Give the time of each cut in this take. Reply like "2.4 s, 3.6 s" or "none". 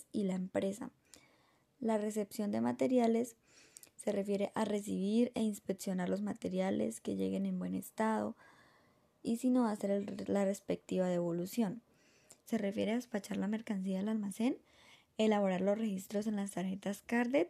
12.5 s